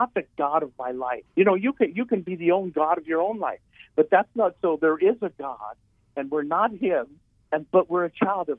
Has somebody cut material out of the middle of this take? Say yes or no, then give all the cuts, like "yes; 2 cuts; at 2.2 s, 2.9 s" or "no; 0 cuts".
yes; 1 cut; at 1.3 s